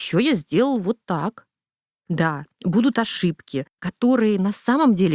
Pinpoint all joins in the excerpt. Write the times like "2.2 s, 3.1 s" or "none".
1.9 s